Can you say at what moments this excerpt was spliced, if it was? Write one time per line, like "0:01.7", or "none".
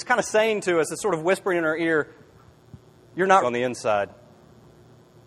0:03.4